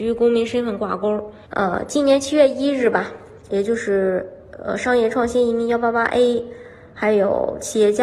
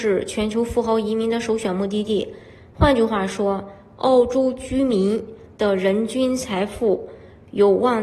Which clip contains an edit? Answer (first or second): first